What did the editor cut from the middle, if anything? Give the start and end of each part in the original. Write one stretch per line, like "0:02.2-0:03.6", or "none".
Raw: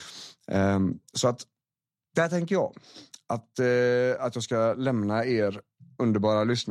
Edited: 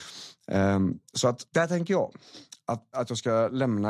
0:01.5-0:02.1
0:03.5-0:04.2